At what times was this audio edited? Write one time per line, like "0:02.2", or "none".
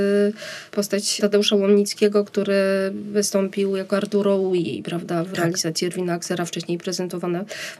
none